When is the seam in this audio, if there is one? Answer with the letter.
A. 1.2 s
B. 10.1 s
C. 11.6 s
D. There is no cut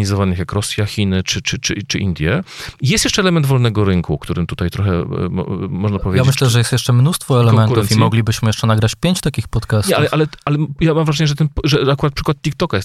A